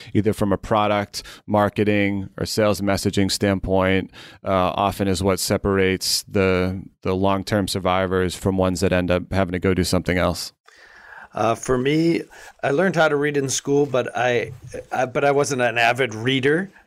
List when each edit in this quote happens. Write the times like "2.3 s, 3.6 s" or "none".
8.4 s